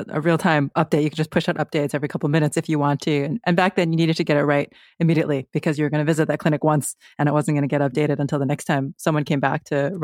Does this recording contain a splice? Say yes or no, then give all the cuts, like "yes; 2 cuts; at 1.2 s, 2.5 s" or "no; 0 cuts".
no; 0 cuts